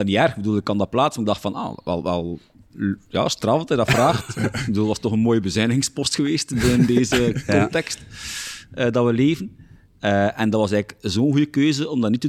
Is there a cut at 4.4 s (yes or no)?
no